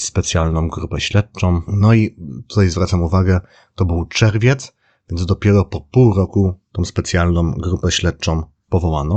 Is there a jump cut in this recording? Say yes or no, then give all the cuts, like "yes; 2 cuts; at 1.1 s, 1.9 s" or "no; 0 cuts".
yes; 1 cut; at 1.7 s